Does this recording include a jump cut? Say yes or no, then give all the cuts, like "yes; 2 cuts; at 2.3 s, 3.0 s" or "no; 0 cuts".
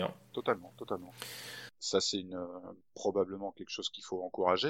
yes; 1 cut; at 1.7 s